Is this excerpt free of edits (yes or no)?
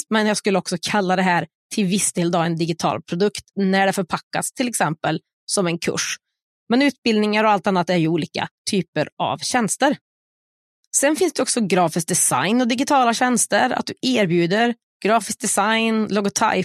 yes